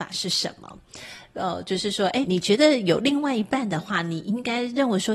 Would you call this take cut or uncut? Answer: cut